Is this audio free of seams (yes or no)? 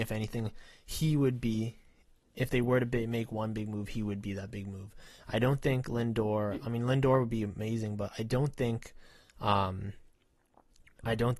yes